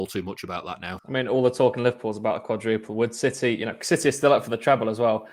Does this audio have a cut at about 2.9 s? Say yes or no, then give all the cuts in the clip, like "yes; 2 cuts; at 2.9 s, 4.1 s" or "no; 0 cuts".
no; 1 cut; at 1.0 s